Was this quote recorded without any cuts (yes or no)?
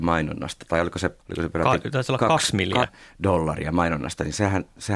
no